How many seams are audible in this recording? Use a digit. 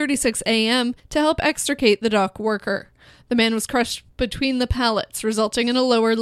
0